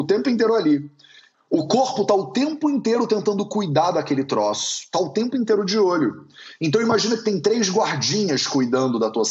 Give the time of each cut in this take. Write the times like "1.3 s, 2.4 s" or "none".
1.3 s